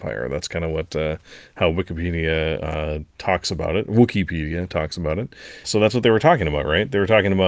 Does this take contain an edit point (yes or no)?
yes